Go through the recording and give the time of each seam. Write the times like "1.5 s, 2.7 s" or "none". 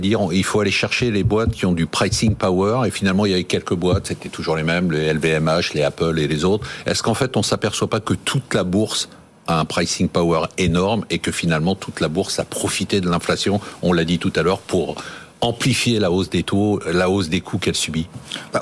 none